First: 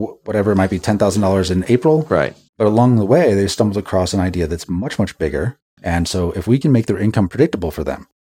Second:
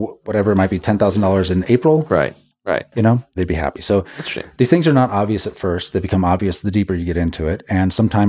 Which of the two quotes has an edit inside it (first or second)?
first